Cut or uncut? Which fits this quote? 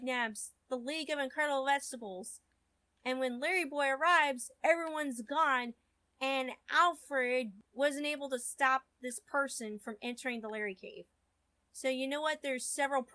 uncut